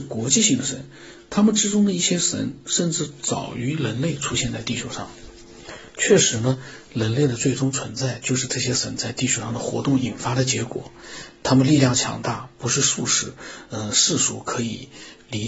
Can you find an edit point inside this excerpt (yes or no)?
no